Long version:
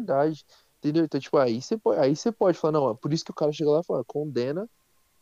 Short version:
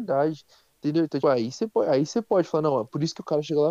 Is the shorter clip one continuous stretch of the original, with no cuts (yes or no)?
no